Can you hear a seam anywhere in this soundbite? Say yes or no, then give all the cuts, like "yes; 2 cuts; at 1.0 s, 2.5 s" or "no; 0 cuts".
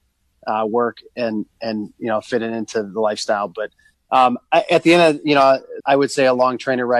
yes; 2 cuts; at 3.9 s, 5.8 s